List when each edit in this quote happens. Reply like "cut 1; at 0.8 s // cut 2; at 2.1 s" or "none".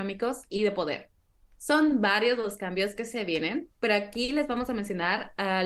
none

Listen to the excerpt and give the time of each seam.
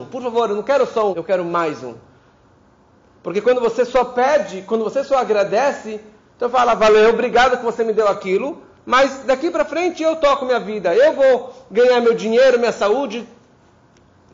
cut 1; at 1.1 s

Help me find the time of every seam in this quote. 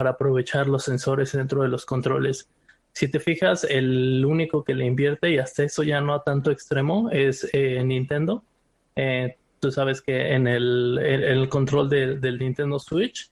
none

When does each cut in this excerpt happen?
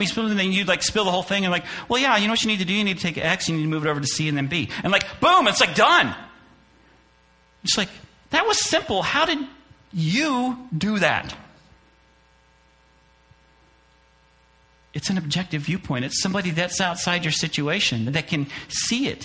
cut 1; at 18.1 s

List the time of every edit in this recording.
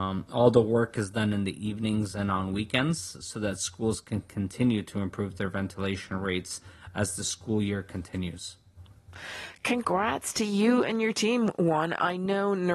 none

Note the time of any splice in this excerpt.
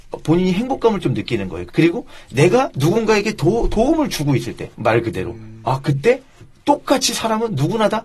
cut 1; at 1.7 s // cut 2; at 4.7 s

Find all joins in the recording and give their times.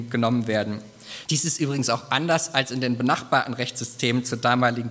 cut 1; at 1.2 s

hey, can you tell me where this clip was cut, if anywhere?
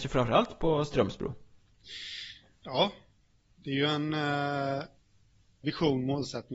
cut 1; at 5.6 s

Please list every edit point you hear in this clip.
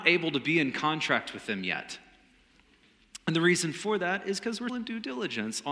cut 1; at 4.7 s

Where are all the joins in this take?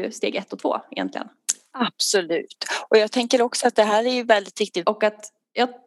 cut 1; at 4.8 s

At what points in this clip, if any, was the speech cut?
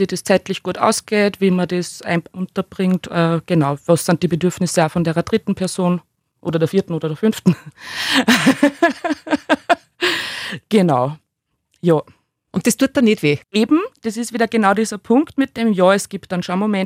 cut 1; at 13.4 s

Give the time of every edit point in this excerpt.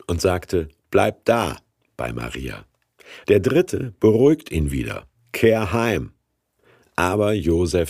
cut 1; at 3.2 s

